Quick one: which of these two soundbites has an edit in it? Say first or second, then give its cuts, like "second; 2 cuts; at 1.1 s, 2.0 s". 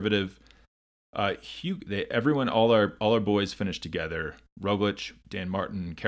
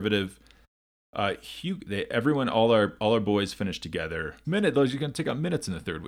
second; 1 cut; at 4.4 s